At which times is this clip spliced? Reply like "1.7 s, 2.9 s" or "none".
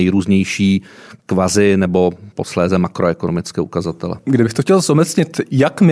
4.2 s